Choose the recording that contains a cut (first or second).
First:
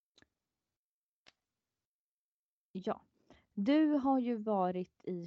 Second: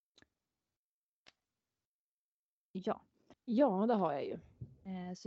second